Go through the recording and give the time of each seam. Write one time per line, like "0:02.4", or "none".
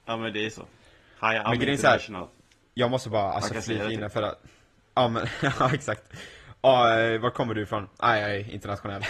none